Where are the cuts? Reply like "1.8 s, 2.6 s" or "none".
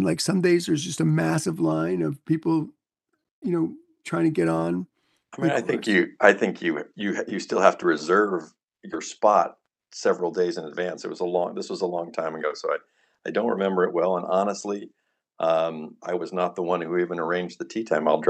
none